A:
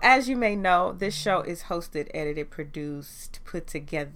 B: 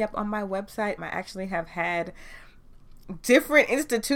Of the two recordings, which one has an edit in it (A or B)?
B